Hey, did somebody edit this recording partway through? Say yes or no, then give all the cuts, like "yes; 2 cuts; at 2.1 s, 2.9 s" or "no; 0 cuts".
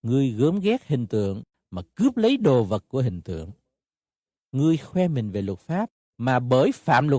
no; 0 cuts